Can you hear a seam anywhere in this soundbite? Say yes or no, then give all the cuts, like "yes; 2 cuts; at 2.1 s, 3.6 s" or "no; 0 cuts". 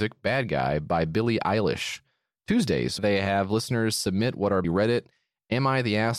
yes; 2 cuts; at 3.0 s, 4.6 s